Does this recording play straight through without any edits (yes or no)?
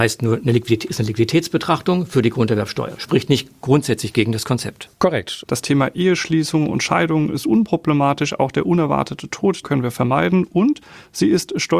no